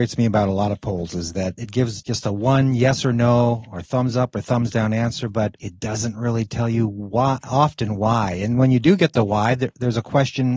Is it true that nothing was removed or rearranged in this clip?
yes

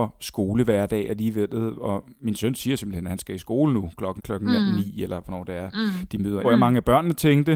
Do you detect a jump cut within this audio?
yes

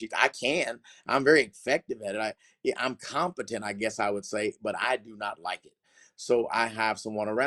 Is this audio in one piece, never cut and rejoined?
yes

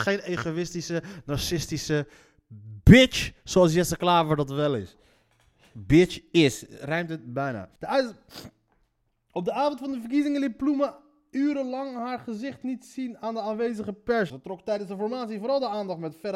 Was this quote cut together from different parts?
yes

